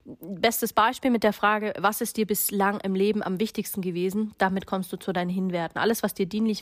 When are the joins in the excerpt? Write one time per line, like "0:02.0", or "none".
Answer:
none